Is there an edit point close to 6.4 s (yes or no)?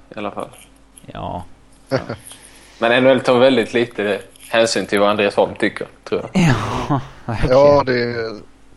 no